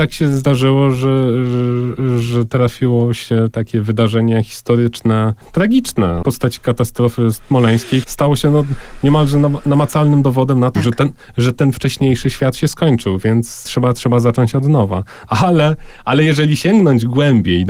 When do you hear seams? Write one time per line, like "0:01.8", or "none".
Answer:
0:08.0
0:10.7
0:15.3

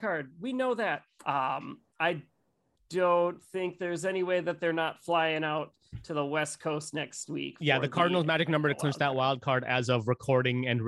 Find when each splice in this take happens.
0:01.2

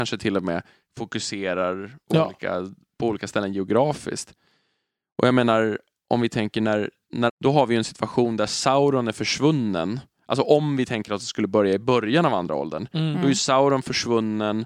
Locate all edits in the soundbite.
0:07.3

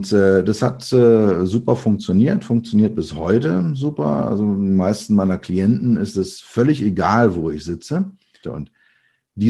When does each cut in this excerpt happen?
0:08.4

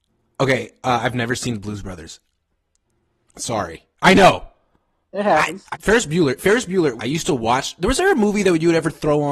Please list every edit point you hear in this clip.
0:05.7
0:07.0

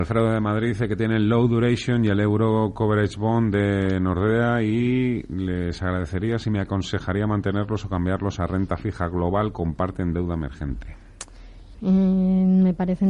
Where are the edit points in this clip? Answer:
0:11.7

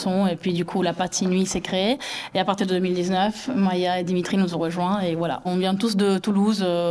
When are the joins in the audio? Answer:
none

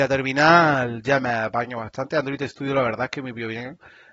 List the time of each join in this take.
none

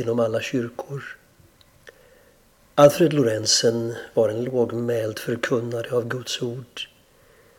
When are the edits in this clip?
none

